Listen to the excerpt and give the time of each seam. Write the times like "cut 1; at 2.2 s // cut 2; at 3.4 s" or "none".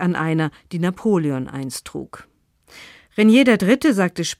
none

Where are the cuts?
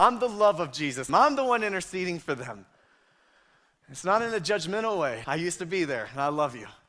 cut 1; at 1.1 s // cut 2; at 5.2 s

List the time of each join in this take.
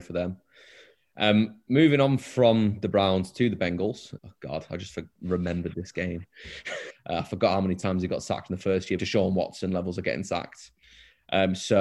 cut 1; at 4.2 s // cut 2; at 6.9 s // cut 3; at 9.0 s

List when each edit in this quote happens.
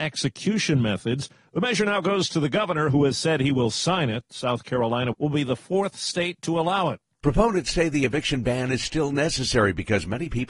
cut 1; at 5.1 s // cut 2; at 7.1 s

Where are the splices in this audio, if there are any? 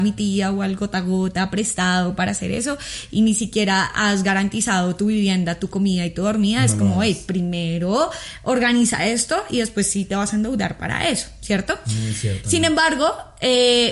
none

